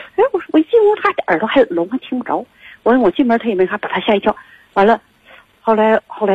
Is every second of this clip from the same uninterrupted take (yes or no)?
yes